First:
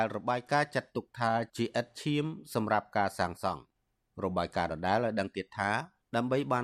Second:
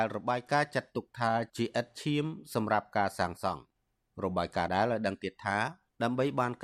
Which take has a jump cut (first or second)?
second